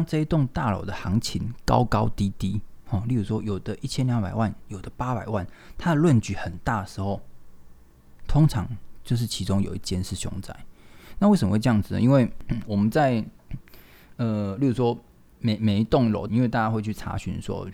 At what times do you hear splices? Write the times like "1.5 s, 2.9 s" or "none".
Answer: 12.7 s, 16.3 s